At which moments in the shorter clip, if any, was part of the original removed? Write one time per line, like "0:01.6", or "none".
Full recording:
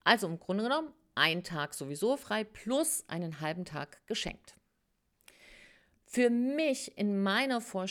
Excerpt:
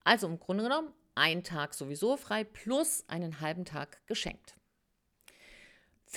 none

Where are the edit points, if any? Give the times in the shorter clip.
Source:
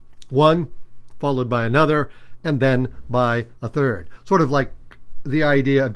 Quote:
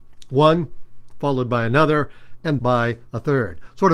0:02.6

